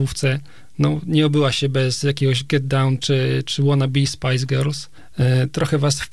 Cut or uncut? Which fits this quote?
uncut